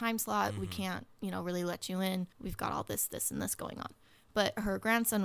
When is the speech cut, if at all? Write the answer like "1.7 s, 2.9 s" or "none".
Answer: 2.3 s